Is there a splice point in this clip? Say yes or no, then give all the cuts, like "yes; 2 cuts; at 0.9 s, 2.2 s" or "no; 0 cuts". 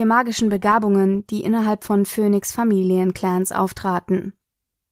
no; 0 cuts